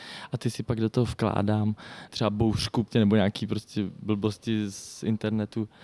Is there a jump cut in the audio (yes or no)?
yes